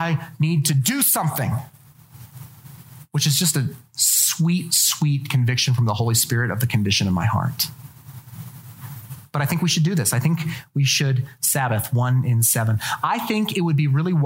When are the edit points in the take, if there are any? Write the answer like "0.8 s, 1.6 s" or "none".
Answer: none